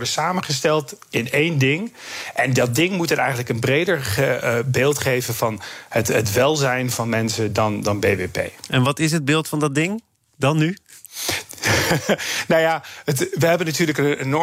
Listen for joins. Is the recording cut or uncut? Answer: uncut